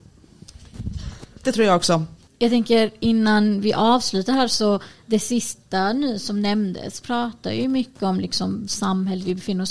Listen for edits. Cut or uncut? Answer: cut